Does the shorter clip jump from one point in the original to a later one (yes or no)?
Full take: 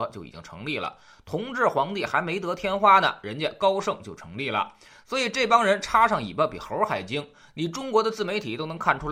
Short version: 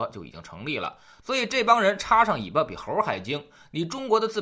yes